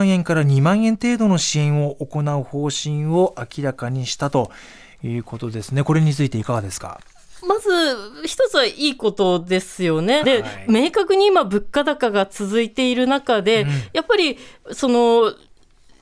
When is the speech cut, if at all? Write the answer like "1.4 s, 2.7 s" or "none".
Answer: 10.2 s